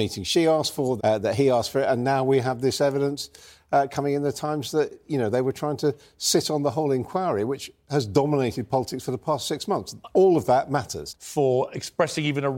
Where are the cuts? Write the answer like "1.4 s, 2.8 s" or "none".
1.0 s, 11.1 s